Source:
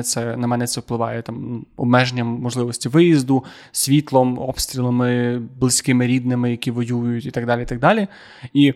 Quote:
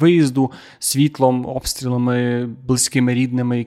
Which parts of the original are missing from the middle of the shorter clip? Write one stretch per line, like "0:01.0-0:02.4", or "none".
none

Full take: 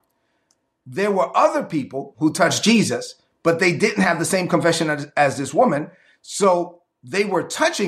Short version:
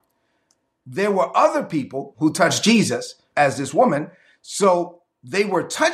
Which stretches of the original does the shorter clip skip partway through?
0:03.3-0:05.1

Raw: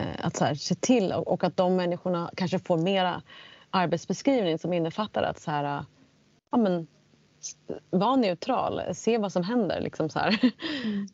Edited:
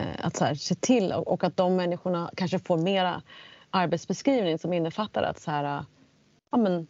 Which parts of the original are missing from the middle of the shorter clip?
none

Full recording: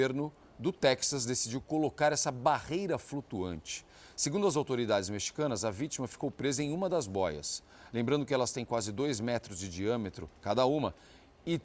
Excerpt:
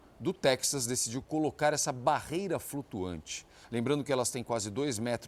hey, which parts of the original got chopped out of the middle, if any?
0:04.0-0:07.9

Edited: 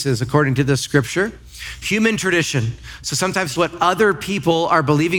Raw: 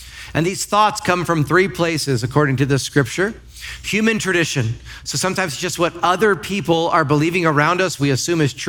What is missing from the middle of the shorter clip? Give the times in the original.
0:05.6-0:05.8

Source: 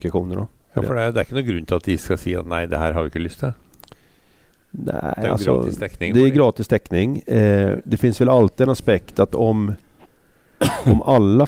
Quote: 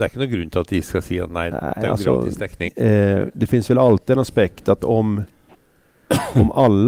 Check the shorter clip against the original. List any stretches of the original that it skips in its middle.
0:02.7-0:04.9
0:06.1-0:07.2

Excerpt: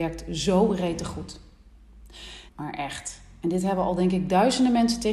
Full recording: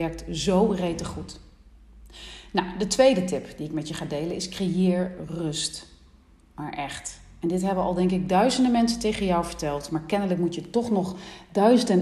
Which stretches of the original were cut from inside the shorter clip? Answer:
0:02.5-0:06.5

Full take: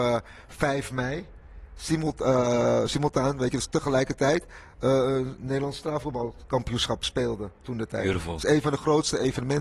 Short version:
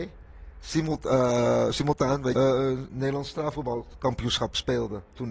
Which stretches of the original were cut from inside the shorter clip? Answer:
0:03.5-0:04.8

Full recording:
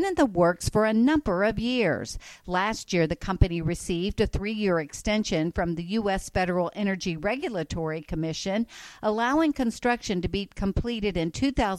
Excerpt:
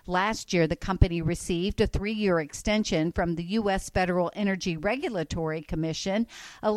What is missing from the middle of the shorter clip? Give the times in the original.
none

